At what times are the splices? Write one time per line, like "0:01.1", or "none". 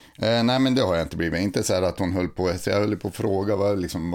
none